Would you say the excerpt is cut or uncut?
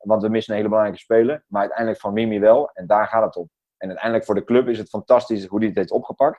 uncut